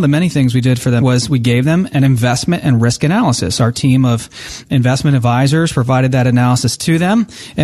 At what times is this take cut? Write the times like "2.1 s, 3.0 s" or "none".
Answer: 1.0 s

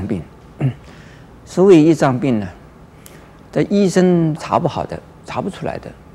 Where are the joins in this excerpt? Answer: 4.4 s

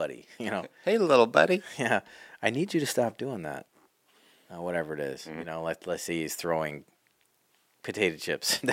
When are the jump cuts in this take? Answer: none

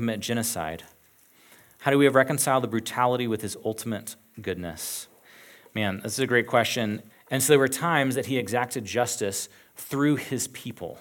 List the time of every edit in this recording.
7.1 s

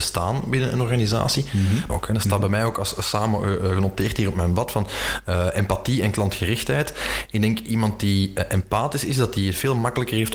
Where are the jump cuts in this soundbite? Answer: 1.9 s

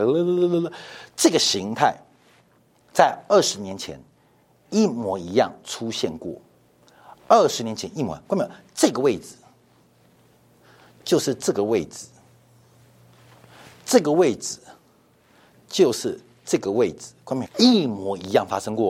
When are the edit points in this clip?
17.4 s

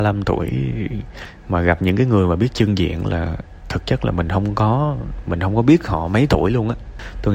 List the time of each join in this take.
none

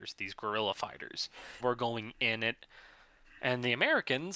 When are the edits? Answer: 1.6 s

